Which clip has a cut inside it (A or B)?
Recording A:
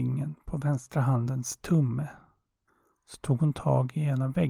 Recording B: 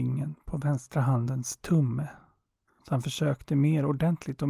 B